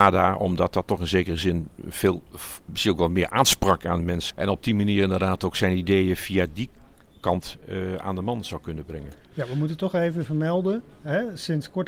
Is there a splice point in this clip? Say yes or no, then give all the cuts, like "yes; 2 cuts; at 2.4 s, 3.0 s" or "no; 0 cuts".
yes; 1 cut; at 4.3 s